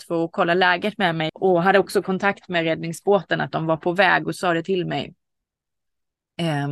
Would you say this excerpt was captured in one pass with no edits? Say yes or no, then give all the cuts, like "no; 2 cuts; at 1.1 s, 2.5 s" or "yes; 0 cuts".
no; 1 cut; at 1.3 s